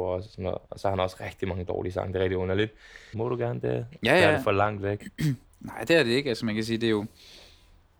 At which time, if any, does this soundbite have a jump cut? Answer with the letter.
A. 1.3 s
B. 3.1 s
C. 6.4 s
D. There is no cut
B